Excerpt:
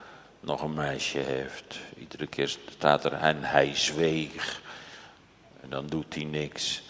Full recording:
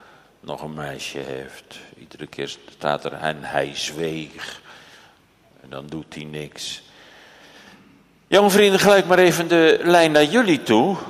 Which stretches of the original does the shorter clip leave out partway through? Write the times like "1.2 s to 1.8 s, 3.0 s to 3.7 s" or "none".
none